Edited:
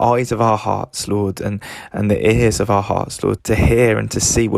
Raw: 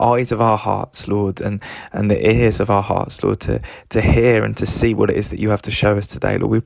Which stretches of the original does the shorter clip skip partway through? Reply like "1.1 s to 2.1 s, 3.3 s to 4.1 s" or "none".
3.4 s to 3.8 s